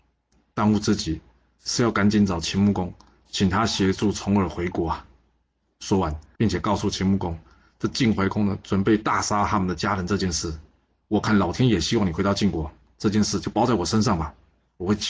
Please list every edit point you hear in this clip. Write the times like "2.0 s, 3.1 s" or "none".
6.4 s, 11.0 s